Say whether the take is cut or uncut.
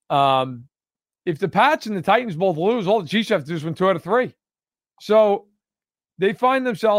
uncut